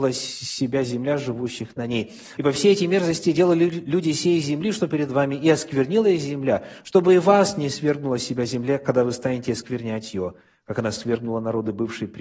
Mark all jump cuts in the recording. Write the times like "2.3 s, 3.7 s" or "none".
2.4 s